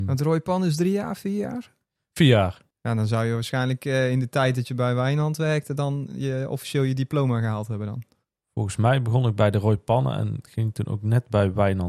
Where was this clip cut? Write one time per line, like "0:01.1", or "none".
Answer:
none